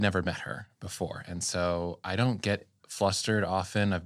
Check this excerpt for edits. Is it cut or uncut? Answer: uncut